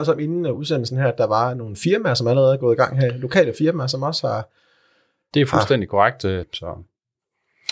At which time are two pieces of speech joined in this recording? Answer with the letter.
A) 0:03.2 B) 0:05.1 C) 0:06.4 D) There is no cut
C